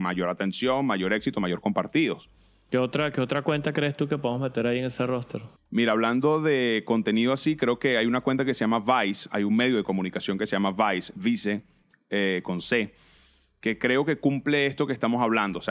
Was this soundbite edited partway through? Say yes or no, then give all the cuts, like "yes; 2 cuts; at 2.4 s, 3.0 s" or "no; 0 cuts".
no; 0 cuts